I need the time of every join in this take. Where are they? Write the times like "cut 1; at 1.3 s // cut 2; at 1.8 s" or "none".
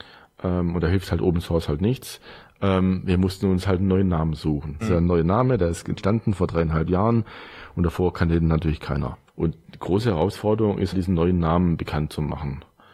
cut 1; at 4.8 s // cut 2; at 9.3 s // cut 3; at 10.9 s